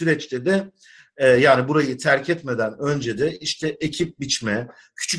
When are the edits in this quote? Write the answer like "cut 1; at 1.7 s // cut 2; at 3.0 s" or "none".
none